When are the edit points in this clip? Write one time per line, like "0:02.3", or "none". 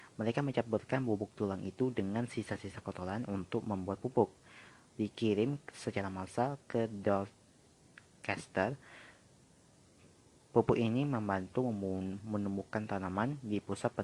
none